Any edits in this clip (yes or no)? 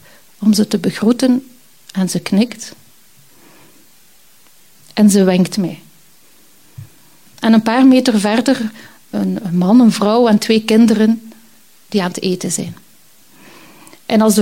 yes